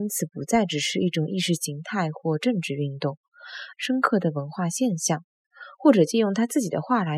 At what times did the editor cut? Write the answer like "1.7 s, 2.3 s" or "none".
3.7 s